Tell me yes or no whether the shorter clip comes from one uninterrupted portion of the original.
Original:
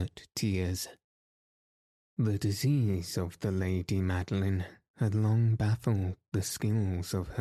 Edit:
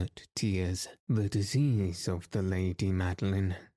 no